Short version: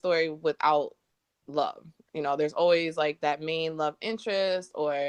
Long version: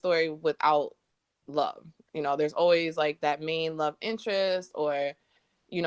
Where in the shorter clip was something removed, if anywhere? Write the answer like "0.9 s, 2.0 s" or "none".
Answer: none